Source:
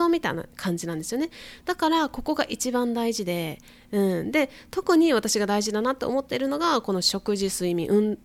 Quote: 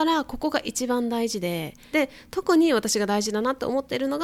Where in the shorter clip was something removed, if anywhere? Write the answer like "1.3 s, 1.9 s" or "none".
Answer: 1.9 s